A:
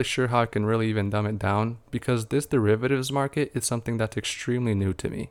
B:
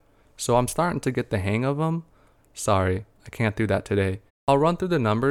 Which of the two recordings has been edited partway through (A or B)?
B